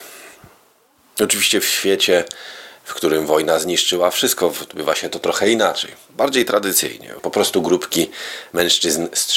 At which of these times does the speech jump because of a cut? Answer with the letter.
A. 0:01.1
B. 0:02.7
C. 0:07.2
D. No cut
C